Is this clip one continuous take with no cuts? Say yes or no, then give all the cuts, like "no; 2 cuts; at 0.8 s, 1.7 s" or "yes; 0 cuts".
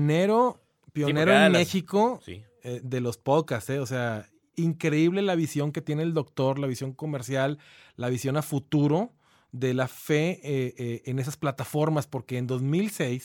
yes; 0 cuts